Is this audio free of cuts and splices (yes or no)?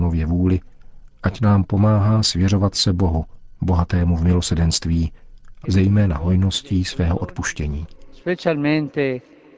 no